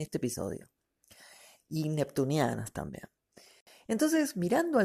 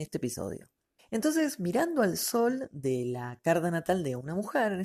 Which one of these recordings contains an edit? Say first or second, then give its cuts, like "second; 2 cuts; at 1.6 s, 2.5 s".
second; 1 cut; at 1.0 s